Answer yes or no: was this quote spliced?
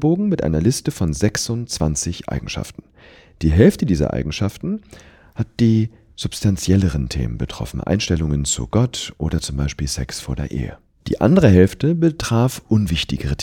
yes